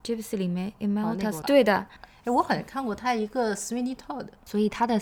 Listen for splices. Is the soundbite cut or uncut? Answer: cut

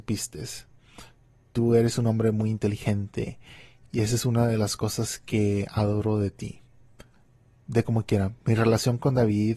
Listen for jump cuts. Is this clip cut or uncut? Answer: uncut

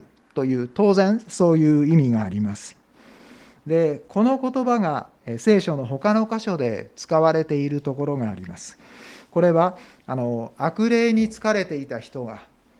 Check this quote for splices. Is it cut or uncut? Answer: uncut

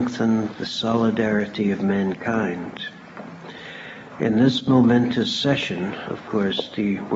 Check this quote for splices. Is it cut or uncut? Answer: cut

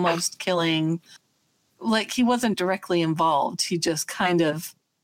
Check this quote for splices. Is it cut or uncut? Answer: uncut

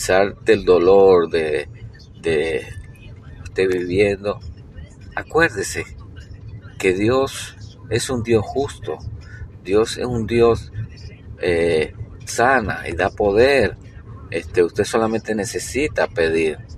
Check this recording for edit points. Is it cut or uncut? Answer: cut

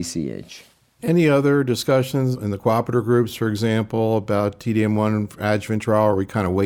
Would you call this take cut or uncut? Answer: uncut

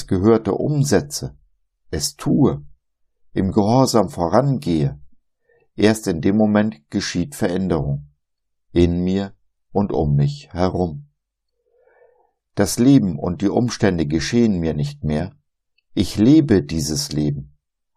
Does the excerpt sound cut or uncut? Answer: uncut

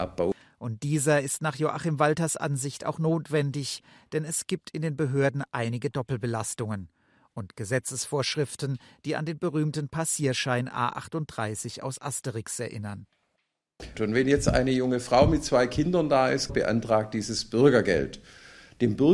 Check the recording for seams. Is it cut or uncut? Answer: cut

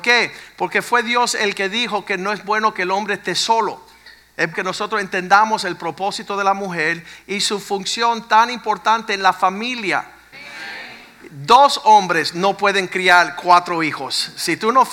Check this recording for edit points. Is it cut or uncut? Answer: cut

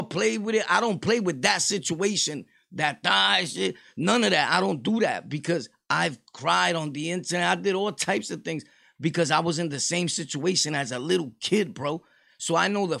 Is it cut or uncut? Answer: uncut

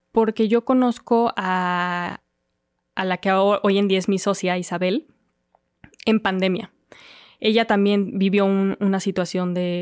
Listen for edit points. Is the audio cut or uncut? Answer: uncut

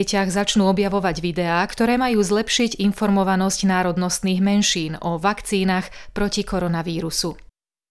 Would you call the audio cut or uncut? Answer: uncut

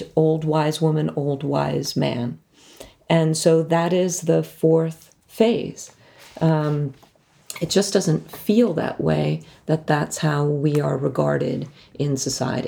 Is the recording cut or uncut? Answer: uncut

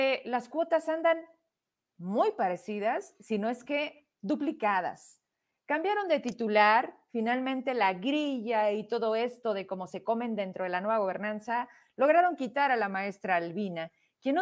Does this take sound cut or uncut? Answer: uncut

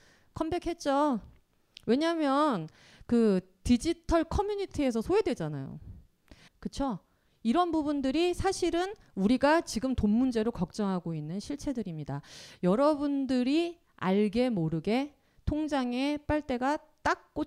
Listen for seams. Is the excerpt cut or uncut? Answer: cut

